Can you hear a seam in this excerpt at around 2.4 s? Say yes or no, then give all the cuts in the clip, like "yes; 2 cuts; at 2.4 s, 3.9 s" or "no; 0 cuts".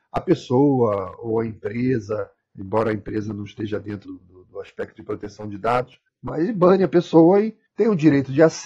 no; 2 cuts; at 4.0 s, 7.7 s